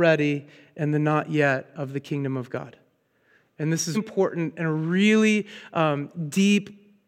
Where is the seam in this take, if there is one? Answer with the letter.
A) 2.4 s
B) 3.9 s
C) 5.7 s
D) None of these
B